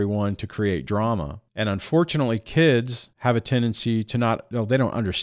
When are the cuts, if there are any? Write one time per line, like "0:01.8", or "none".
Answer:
0:01.5
0:03.1

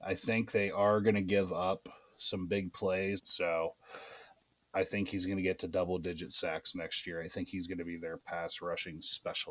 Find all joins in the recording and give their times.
0:03.2

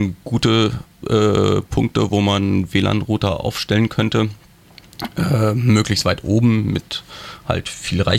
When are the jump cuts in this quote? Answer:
none

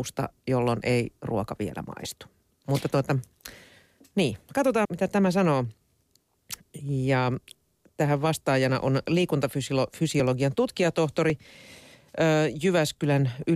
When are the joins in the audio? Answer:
0:04.8

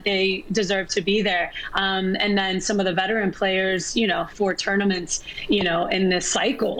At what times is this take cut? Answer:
0:04.3

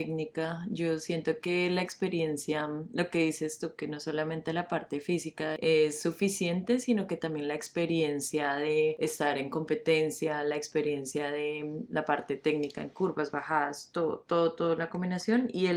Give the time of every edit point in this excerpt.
none

